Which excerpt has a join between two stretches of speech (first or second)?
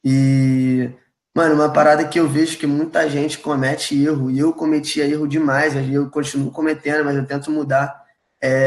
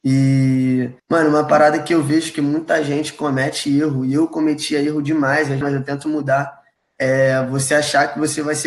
second